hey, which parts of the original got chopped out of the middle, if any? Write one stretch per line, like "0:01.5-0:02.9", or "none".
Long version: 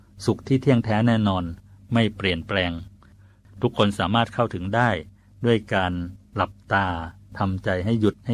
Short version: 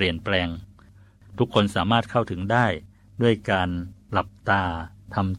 none